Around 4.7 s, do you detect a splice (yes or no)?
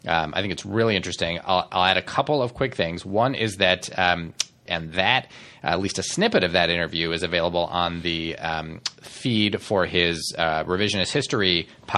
yes